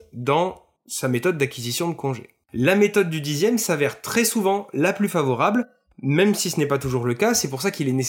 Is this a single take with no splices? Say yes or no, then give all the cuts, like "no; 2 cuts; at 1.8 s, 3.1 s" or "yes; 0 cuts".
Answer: no; 1 cut; at 2.4 s